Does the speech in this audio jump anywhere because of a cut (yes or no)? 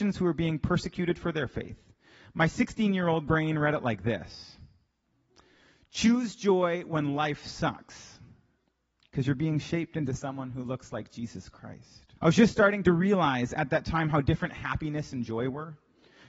yes